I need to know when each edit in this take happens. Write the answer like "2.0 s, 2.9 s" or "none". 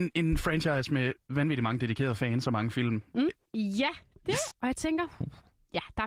3.4 s, 4.5 s